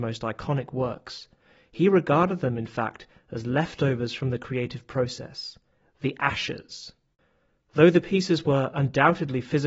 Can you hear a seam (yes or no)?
no